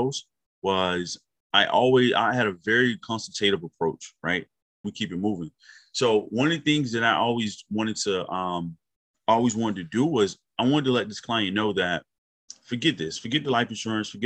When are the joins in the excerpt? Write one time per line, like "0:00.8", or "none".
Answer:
0:04.8

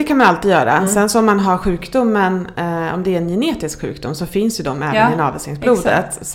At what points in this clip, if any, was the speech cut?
none

